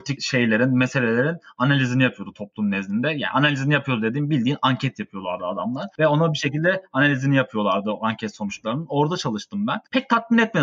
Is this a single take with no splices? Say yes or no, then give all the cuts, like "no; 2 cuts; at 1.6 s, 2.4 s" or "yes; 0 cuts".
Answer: yes; 0 cuts